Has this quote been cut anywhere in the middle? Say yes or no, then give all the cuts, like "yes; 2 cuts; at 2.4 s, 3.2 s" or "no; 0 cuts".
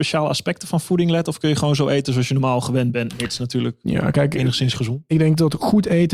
no; 0 cuts